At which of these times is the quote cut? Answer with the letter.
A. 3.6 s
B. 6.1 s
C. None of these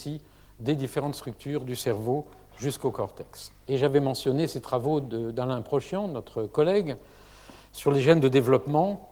A